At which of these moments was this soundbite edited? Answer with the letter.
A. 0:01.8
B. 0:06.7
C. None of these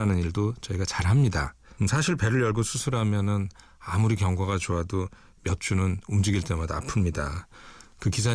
A